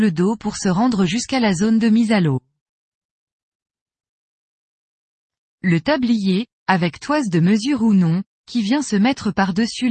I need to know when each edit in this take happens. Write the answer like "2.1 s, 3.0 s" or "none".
none